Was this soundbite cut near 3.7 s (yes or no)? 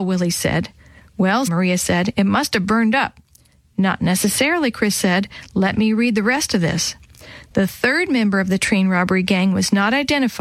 no